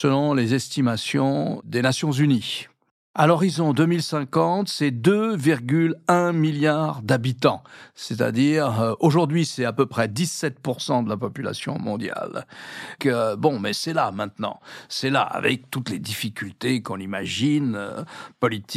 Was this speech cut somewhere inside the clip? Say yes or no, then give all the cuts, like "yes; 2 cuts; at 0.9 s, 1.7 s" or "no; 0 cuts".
yes; 1 cut; at 13.0 s